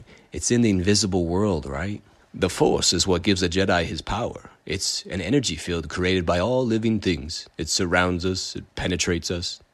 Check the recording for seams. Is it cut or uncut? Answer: cut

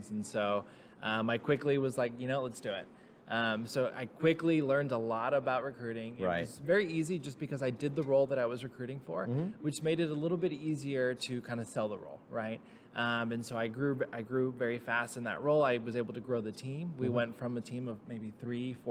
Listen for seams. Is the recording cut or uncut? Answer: uncut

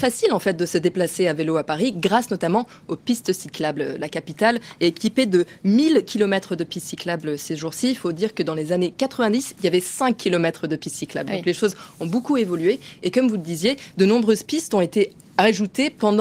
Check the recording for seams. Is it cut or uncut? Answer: uncut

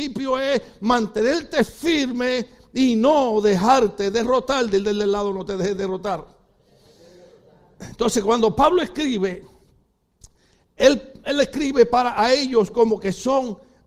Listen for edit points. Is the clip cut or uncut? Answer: uncut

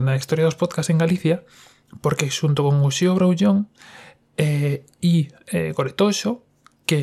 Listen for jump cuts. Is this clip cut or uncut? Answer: uncut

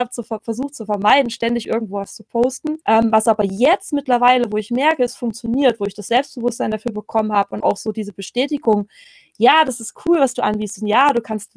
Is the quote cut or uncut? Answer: cut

